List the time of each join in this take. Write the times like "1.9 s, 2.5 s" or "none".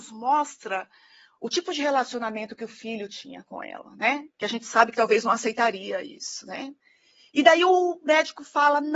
4.3 s